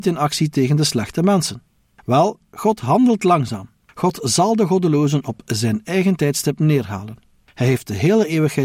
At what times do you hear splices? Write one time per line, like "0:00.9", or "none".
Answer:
none